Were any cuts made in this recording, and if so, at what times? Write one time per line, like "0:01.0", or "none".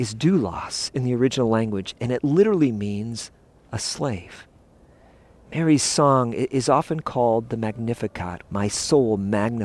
0:08.5